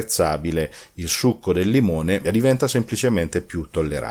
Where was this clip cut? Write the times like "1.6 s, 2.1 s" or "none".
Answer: 2.2 s

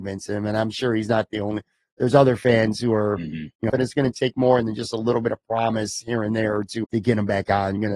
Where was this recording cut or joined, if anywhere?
3.7 s, 6.8 s

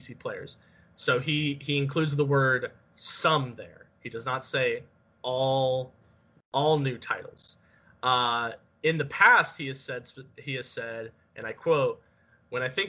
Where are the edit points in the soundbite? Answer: none

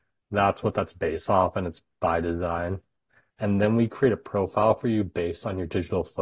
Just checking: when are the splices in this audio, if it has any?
3.3 s

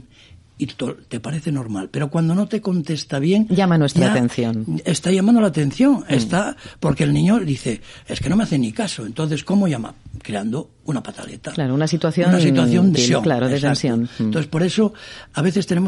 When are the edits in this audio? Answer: 13.0 s

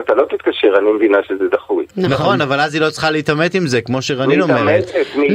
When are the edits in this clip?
none

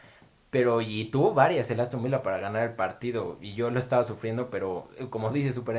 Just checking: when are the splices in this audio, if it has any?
none

